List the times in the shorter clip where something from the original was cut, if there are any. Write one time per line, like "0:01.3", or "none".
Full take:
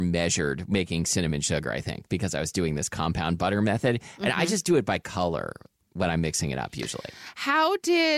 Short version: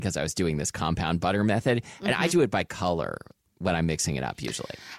0:02.3